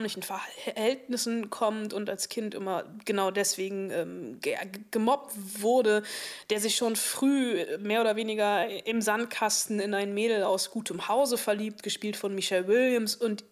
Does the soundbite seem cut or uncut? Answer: uncut